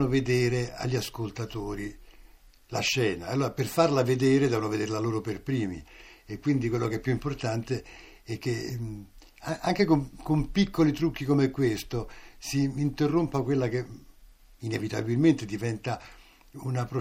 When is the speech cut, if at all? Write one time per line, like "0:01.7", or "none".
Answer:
none